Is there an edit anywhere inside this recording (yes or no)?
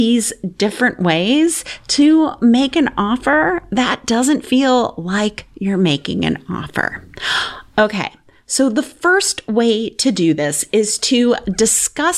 no